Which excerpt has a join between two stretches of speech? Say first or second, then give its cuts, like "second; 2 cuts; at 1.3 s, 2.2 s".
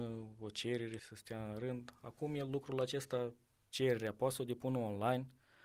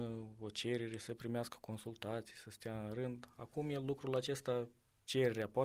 first; 1 cut; at 1.0 s